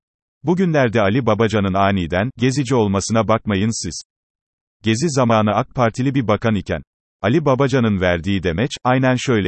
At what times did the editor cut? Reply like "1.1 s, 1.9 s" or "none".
none